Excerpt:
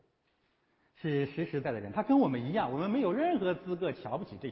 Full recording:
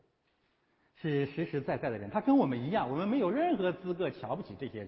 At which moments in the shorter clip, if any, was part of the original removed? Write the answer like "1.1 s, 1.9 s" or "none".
1.6 s